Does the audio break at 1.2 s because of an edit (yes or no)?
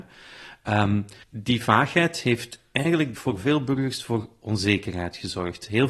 yes